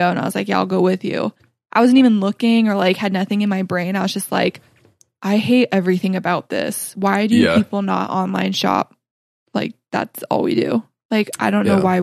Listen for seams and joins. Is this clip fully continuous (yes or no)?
yes